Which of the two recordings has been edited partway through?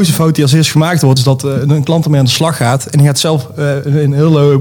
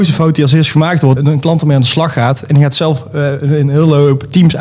second; 1 cut; at 1.2 s

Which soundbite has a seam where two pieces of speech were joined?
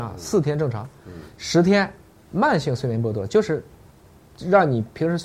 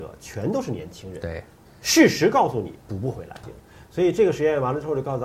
second; 1 cut; at 3.4 s

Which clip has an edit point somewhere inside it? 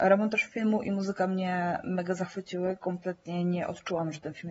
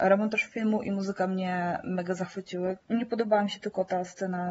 second; 1 cut; at 2.8 s

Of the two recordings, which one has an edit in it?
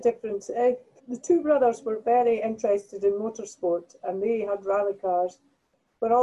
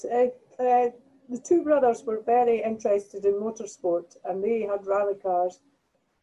first; 1 cut; at 1.0 s

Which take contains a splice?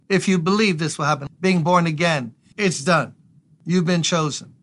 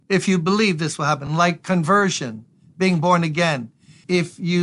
first; 2 cuts; at 1.3 s, 2.5 s

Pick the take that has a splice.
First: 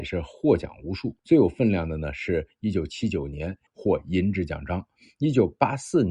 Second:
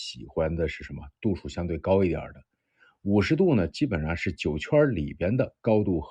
first; 2 cuts; at 1.2 s, 3.7 s

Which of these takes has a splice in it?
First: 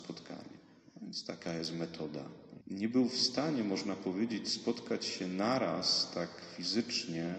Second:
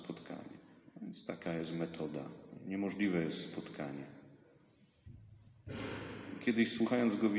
first; 1 cut; at 2.6 s

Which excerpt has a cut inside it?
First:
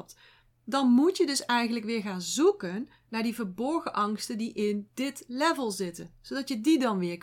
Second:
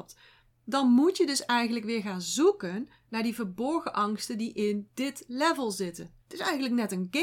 second; 1 cut; at 6.2 s

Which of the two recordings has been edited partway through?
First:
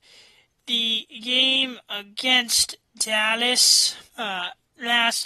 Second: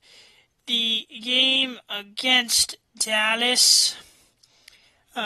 first; 1 cut; at 4.1 s

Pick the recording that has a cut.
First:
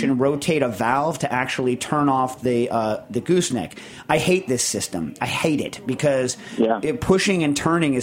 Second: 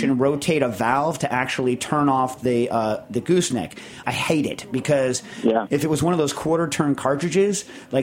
second; 2 cuts; at 4.0 s, 5.7 s

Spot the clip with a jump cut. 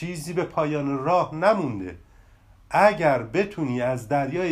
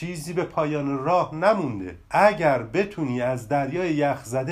second; 1 cut; at 2.0 s

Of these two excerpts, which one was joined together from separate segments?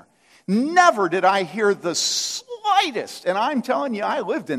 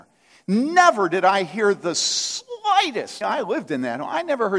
second; 1 cut; at 3.2 s

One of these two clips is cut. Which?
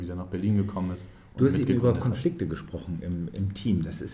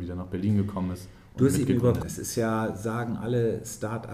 second; 1 cut; at 2.0 s

